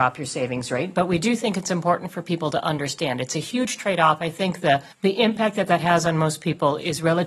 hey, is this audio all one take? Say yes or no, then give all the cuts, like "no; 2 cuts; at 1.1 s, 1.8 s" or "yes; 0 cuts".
no; 1 cut; at 4.9 s